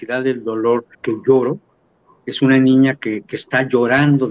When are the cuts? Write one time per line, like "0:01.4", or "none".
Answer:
0:00.9
0:03.2

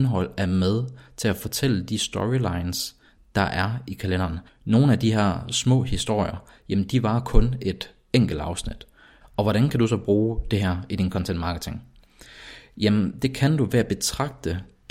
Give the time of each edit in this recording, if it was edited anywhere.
0:04.5
0:09.2

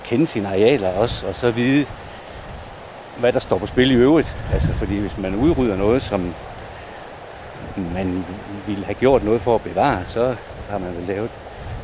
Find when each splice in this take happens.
none

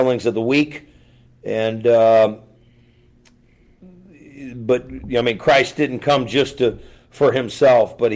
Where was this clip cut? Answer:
none

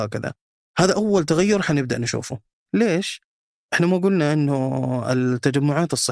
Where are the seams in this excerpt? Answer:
0:02.7

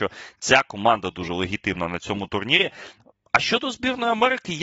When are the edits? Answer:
0:01.1

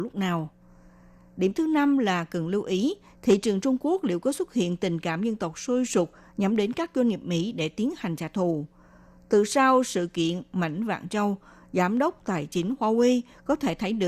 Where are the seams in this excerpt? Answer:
none

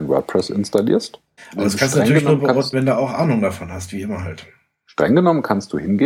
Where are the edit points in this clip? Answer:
0:01.4
0:02.7

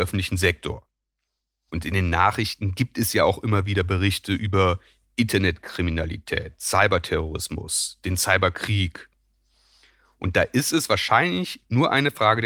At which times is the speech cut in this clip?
none

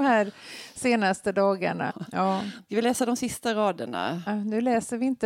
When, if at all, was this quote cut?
0:01.9
0:04.3

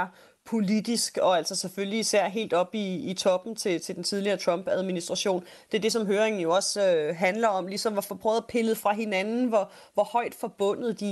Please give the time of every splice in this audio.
none

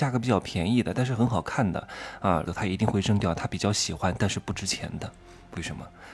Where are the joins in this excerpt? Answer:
0:02.4

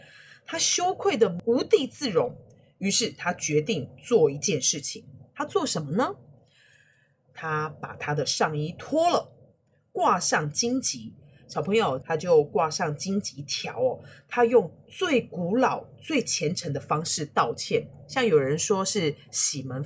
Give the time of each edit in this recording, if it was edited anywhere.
0:12.0

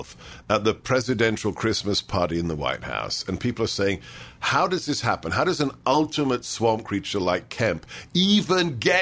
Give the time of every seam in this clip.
none

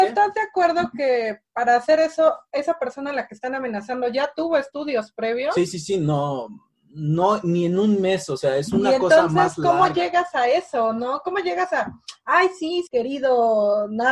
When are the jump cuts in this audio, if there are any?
0:12.9

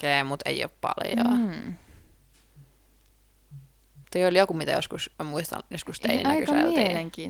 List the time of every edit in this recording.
0:04.0
0:05.1

